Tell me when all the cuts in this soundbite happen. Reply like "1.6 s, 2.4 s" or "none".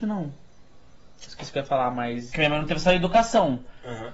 1.3 s, 2.3 s